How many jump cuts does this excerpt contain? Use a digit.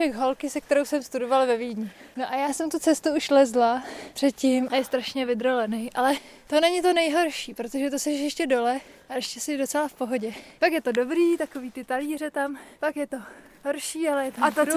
1